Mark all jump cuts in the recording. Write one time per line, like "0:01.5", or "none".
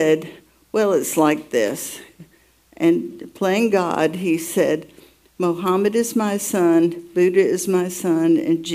none